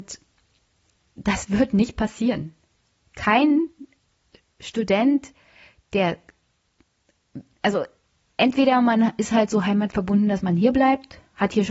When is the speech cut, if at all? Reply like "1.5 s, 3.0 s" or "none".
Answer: none

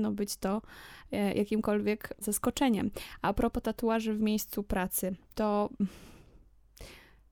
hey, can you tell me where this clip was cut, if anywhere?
5.2 s

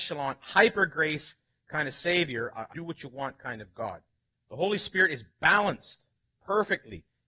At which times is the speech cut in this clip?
2.7 s, 4.3 s

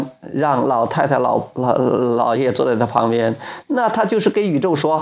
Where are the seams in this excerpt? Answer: 2.4 s

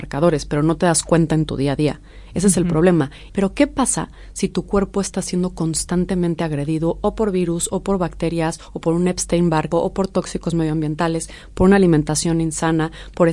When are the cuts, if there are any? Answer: 3.3 s, 9.7 s

